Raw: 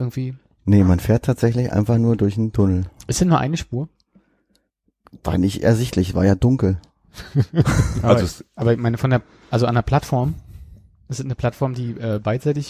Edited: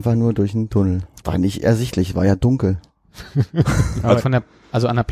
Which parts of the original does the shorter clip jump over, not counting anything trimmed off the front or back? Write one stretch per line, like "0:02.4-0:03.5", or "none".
0:03.0-0:05.2
0:08.2-0:09.0